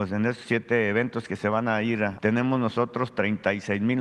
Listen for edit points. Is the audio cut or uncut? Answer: cut